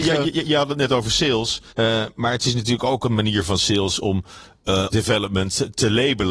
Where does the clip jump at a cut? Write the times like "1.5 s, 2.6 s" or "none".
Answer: 1.7 s, 4.9 s